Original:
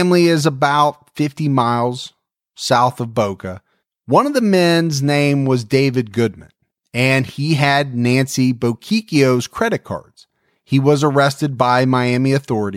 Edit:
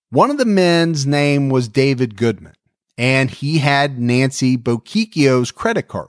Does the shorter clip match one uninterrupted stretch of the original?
yes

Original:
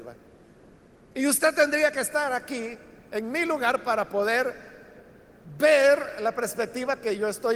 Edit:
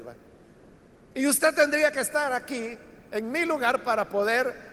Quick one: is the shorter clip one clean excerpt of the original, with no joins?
yes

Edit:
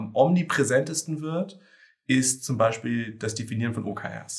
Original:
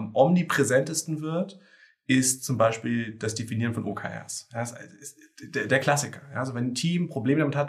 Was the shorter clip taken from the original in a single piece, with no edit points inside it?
yes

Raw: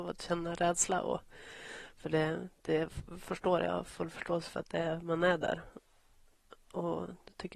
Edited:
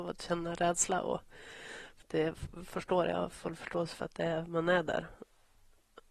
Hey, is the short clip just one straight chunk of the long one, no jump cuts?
no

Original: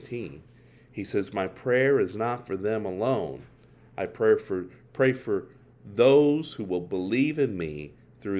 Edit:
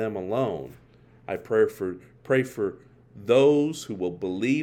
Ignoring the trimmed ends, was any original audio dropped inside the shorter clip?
no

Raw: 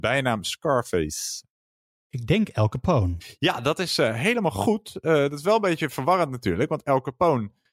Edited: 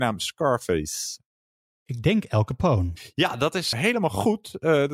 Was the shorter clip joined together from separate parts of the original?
yes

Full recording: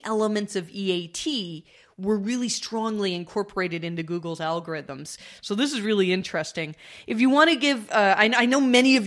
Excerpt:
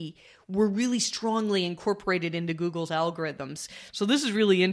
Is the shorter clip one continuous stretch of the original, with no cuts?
yes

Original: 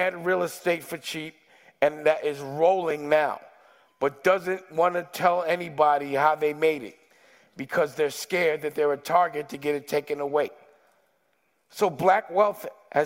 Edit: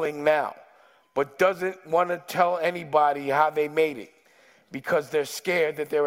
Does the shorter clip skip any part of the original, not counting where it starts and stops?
no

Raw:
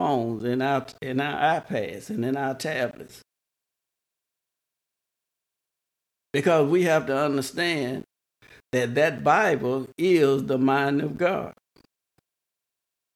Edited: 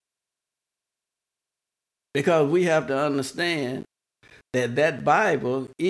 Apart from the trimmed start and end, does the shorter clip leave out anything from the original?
no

